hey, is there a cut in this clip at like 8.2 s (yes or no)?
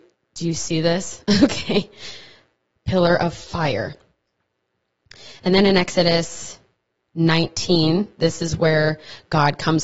yes